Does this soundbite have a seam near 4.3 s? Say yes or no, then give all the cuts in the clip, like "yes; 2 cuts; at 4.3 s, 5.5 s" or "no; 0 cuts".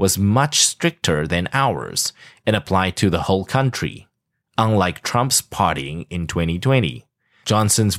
no; 0 cuts